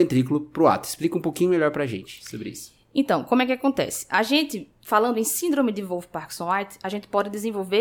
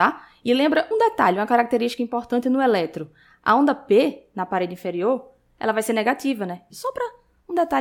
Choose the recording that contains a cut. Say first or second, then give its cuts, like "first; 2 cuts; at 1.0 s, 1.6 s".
second; 2 cuts; at 0.9 s, 6.7 s